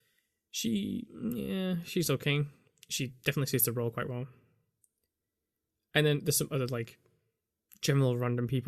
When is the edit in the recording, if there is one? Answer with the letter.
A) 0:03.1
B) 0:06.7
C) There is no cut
C